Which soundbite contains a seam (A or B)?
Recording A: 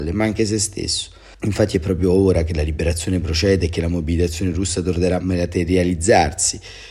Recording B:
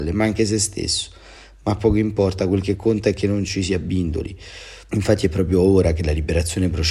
A